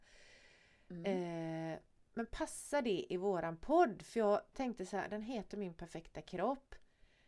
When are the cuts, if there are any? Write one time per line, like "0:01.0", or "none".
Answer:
none